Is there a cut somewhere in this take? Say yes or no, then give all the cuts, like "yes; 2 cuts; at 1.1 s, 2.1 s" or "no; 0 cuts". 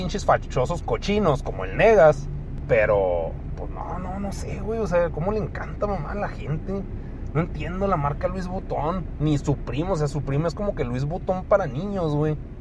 no; 0 cuts